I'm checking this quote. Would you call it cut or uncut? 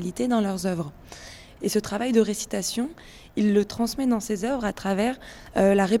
cut